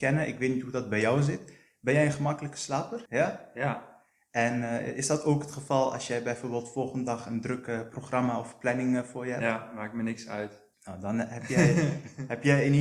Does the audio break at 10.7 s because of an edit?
yes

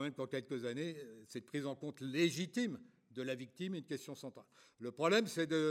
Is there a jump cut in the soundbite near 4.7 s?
no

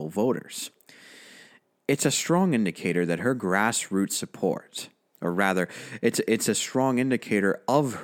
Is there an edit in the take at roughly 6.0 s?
no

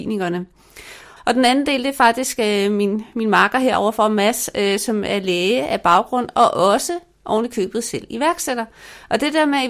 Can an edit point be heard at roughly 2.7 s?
no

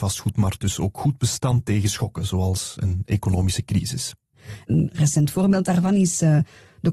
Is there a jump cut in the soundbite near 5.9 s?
no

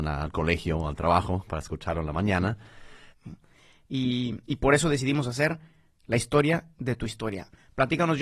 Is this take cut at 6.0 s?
no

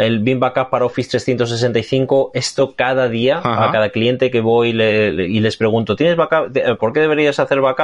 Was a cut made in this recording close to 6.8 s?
yes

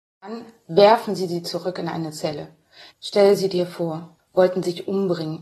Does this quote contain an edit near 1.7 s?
no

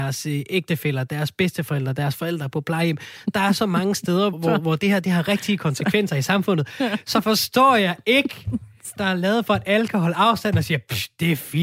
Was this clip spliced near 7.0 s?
no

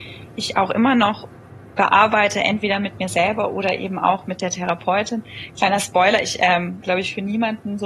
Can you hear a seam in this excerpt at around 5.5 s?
no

